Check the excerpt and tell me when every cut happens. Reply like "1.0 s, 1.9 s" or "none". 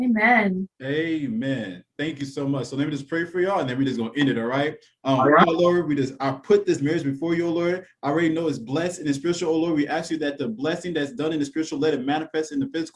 none